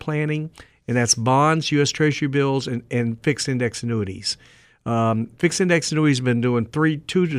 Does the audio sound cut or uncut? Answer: uncut